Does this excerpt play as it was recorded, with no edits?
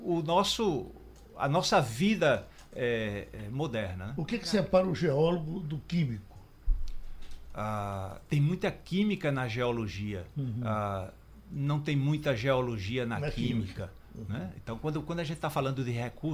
yes; 0 cuts

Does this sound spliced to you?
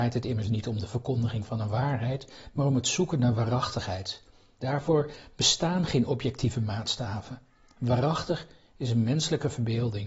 yes; 1 cut; at 4.6 s

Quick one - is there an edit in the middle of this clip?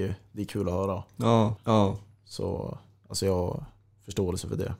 yes; 1 cut; at 1.6 s

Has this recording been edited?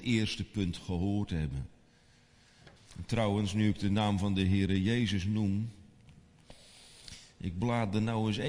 yes; 1 cut; at 2.8 s

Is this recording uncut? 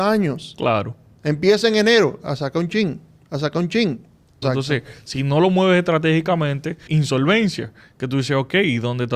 no; 2 cuts; at 4.4 s, 6.9 s

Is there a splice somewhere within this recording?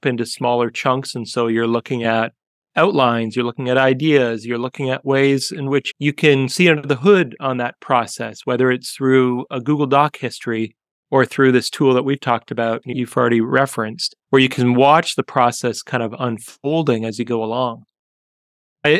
yes; 2 cuts; at 12.8 s, 14.2 s

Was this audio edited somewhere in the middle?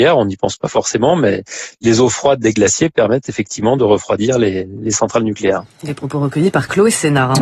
no; 0 cuts

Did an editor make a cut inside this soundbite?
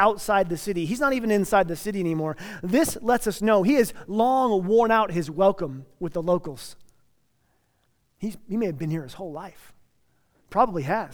no; 0 cuts

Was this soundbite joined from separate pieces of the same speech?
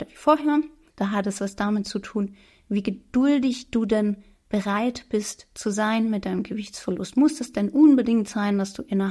yes; 1 cut; at 0.9 s

